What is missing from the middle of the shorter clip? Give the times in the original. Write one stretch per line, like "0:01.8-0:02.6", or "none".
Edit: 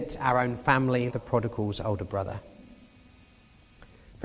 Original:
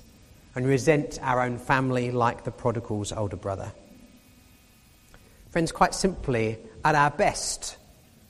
0:02.1-0:02.4